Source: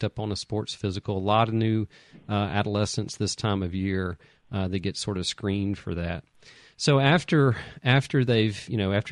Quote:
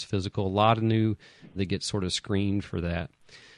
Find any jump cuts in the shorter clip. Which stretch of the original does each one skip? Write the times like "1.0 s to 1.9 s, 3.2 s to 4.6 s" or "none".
2.3 s to 4.7 s